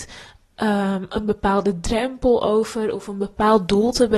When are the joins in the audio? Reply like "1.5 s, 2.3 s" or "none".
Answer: none